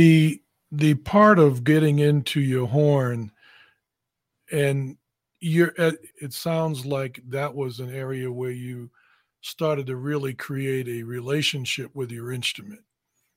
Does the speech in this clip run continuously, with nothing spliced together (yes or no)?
no